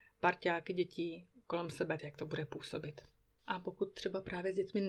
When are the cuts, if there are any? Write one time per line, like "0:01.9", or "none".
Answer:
0:02.0